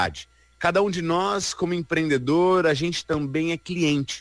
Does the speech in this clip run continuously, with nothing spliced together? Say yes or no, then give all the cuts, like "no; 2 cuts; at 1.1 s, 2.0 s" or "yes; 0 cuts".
yes; 0 cuts